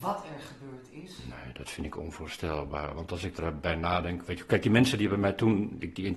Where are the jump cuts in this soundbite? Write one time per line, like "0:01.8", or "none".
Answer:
none